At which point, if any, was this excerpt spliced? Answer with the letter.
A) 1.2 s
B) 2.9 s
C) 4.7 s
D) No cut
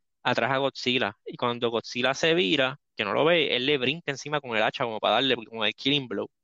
B